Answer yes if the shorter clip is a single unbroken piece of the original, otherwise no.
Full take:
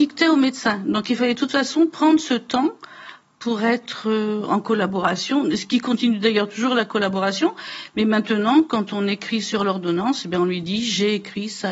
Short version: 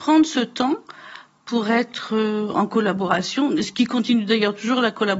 yes